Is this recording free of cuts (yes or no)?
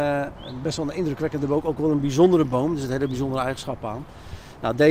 yes